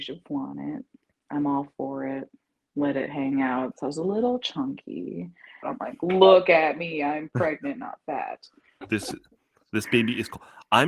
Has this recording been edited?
yes; 3 cuts; at 3.7 s, 5.6 s, 8.8 s

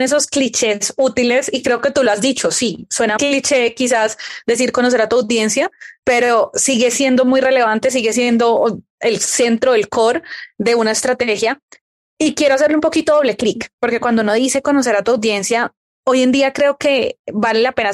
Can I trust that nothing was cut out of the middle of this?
no; 1 cut; at 3.2 s

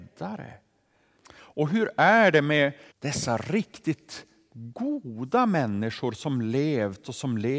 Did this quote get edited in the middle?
yes; 2 cuts; at 1.2 s, 2.9 s

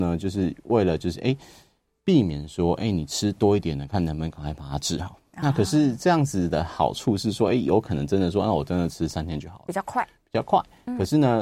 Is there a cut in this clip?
no; 0 cuts

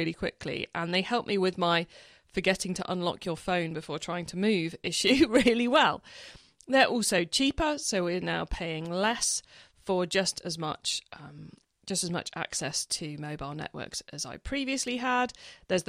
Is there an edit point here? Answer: no; 0 cuts

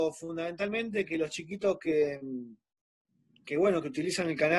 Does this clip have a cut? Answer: no; 0 cuts

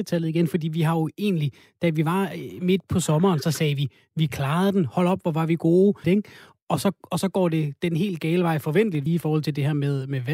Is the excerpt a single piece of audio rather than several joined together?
no; 2 cuts; at 6.0 s, 9.1 s

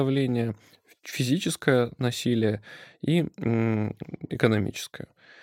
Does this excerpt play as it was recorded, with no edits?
yes; 0 cuts

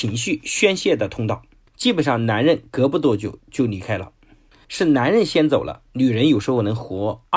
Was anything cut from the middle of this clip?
yes; 2 cuts; at 1.7 s, 4.6 s

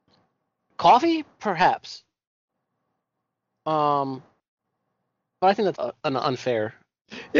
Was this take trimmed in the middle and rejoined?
yes; 1 cut; at 5.7 s

